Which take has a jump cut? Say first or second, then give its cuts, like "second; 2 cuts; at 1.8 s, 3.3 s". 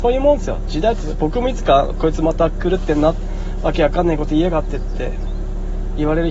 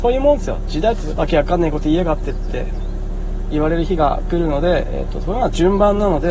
second; 1 cut; at 1.2 s